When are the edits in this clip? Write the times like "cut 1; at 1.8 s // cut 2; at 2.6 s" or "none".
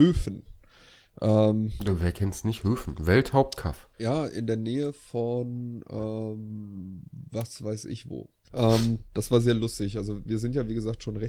cut 1; at 3.9 s // cut 2; at 8.5 s